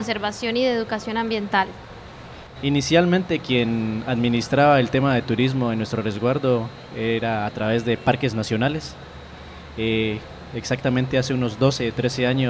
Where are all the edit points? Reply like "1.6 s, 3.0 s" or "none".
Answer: 2.6 s